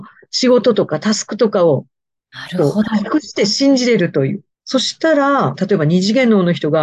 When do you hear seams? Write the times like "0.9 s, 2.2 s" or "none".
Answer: 4.5 s, 5.6 s